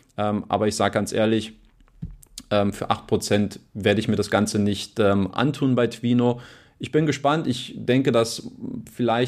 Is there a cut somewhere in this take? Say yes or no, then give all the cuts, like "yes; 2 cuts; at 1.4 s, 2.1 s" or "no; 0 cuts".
no; 0 cuts